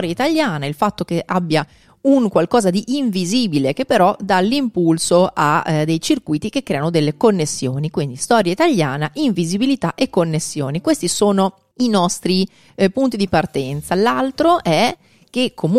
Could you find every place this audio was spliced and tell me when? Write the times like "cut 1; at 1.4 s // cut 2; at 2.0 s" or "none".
none